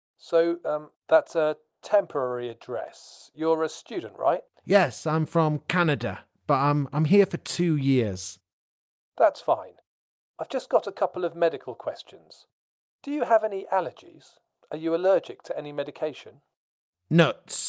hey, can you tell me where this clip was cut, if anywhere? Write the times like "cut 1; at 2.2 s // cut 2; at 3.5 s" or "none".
none

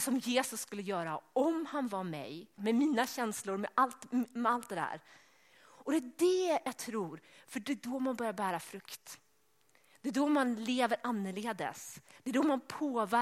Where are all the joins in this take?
cut 1; at 2.6 s

